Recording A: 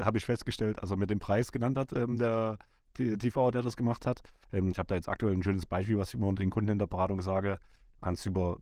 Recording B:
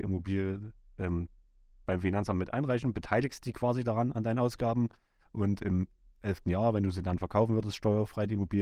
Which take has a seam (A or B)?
A